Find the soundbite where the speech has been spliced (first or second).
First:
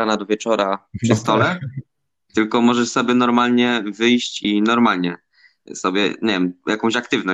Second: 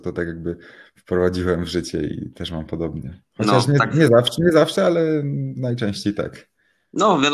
first